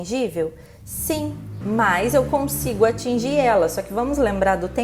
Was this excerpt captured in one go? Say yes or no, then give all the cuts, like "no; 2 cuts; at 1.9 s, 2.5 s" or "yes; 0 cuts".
no; 1 cut; at 1.6 s